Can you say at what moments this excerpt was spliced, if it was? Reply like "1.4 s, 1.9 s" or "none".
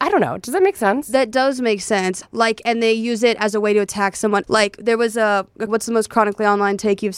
2.2 s, 4.4 s, 5.7 s